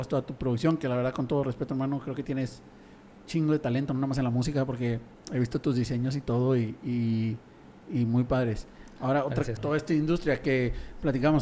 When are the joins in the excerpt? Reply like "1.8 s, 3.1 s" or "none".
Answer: 7.8 s, 9.6 s